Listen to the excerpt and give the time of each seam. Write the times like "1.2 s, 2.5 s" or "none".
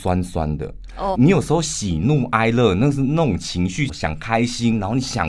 1.1 s, 3.9 s